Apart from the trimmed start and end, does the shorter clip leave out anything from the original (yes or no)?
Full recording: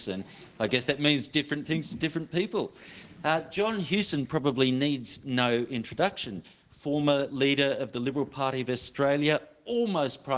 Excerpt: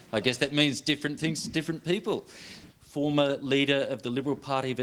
yes